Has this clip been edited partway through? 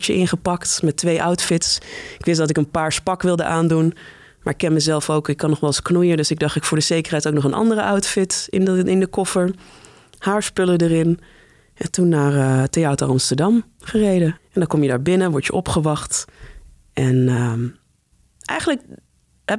yes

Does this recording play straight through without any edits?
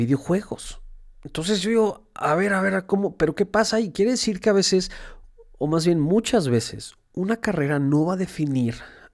yes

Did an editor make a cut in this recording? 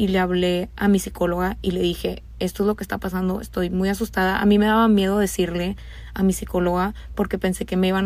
no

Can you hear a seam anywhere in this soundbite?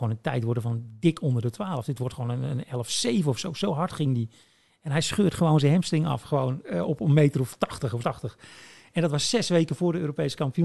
yes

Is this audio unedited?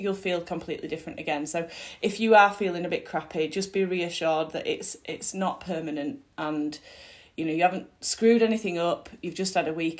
yes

